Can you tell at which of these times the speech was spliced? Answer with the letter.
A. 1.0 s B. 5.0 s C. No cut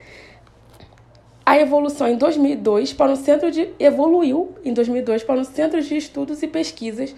C